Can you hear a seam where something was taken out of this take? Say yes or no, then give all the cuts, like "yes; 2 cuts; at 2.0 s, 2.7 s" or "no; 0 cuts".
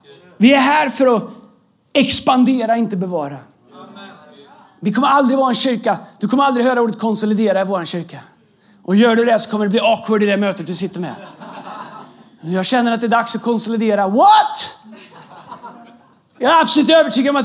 no; 0 cuts